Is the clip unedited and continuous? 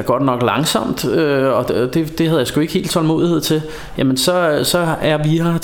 yes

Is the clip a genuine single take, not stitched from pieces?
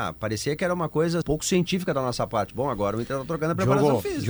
no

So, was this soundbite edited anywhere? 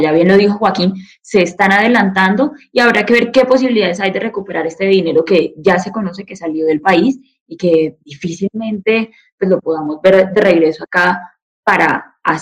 no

